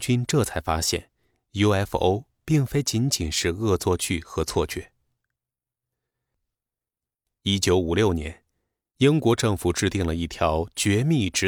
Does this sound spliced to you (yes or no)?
no